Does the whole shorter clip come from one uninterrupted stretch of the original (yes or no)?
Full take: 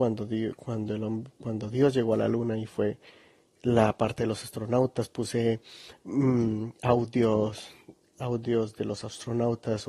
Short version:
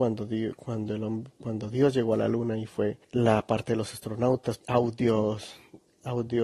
no